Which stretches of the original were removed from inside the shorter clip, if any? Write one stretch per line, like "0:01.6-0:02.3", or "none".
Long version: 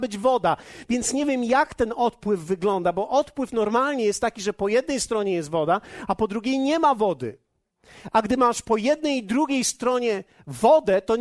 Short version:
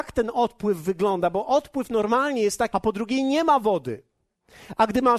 0:04.3-0:06.1